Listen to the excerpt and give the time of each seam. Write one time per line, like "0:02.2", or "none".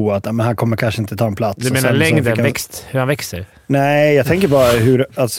none

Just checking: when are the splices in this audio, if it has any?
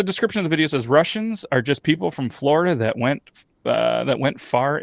none

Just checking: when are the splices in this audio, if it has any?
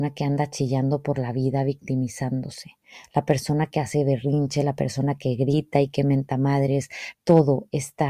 0:07.1

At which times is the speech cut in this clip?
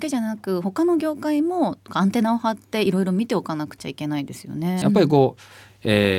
0:04.8

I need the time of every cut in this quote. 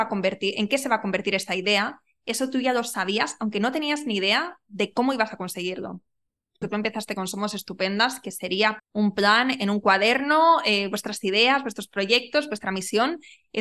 0:06.6
0:08.8

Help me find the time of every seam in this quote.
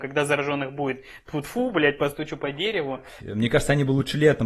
0:01.4
0:03.2

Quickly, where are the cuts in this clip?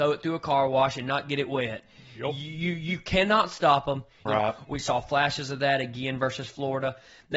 0:04.3

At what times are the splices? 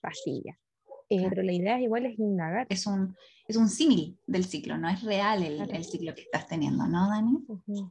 0:01.3
0:02.7

